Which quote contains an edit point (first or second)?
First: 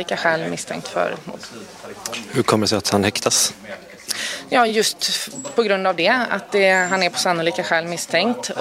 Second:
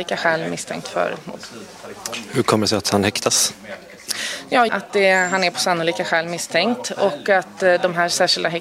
second